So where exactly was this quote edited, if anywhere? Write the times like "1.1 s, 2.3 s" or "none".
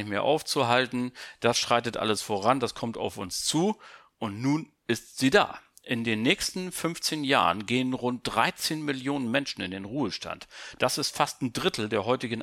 none